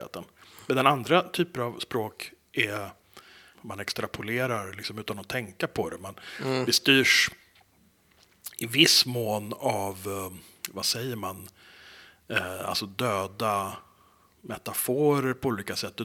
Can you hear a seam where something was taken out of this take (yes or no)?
yes